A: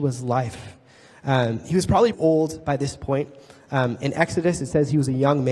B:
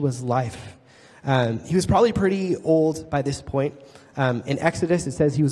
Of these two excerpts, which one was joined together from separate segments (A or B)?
A